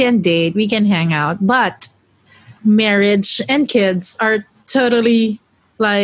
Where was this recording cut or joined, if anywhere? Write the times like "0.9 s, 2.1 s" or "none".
2.6 s